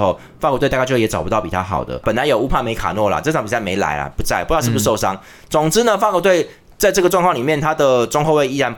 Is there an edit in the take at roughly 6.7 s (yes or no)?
no